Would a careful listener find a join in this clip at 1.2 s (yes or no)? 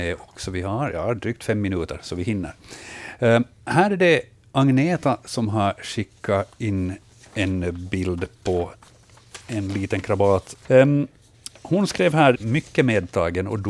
no